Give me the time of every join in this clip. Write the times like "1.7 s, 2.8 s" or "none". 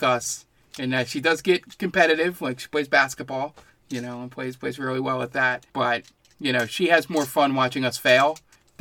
5.7 s